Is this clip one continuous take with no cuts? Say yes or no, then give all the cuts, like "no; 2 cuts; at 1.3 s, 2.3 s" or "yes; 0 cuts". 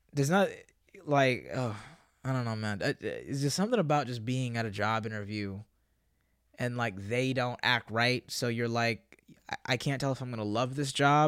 yes; 0 cuts